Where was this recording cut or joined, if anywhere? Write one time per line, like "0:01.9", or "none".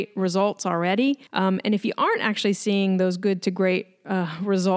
0:01.3